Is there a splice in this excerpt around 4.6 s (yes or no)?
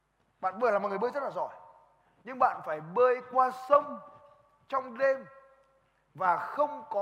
no